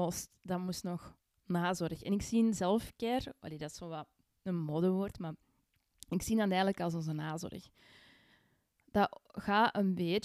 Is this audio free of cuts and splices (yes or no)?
yes